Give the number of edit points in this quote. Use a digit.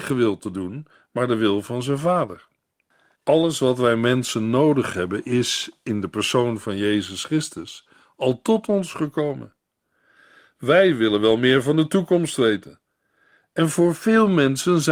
1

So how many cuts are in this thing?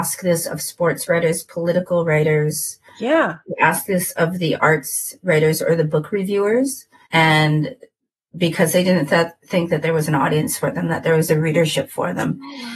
1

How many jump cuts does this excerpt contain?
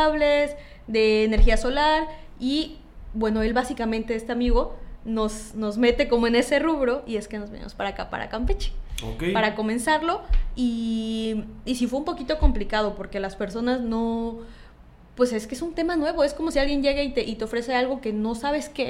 0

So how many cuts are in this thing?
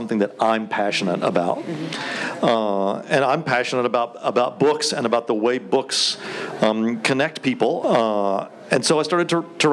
1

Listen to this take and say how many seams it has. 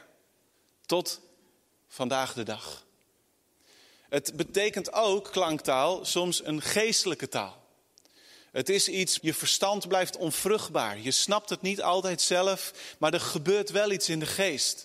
1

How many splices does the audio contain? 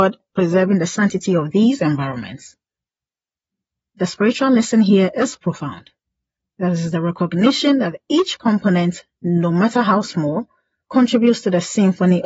0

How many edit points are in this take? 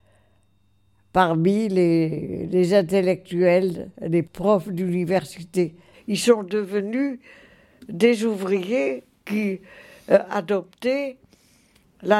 2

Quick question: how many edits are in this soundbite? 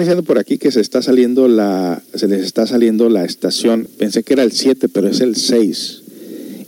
1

